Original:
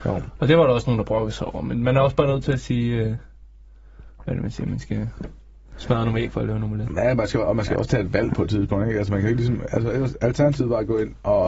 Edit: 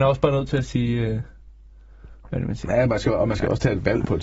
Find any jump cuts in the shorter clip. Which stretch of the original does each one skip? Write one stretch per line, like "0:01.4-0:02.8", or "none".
0:04.6-0:06.9